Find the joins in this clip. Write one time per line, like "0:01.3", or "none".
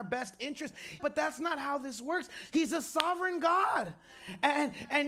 0:01.0